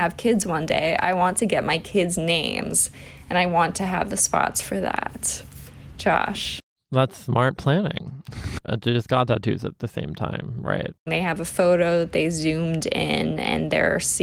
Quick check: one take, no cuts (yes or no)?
no